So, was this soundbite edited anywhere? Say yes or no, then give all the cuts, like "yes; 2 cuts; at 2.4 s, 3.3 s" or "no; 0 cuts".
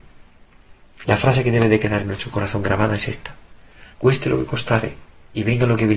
yes; 2 cuts; at 1.0 s, 3.9 s